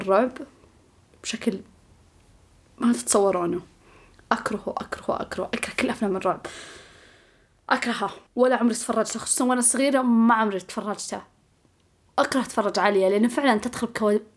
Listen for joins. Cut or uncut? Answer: cut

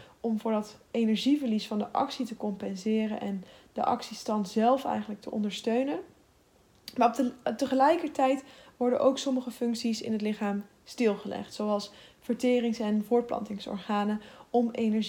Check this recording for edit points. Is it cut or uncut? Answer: uncut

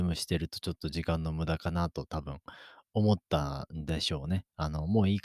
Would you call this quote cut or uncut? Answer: uncut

